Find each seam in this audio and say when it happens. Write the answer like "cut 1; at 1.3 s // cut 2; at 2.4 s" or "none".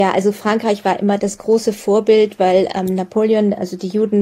none